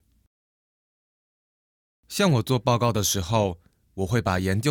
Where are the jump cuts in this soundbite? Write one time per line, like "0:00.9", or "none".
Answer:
none

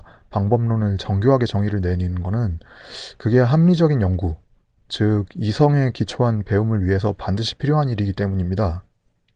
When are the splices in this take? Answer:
none

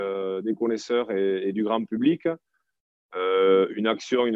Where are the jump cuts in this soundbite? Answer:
none

